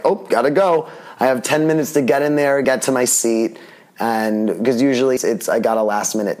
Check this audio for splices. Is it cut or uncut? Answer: cut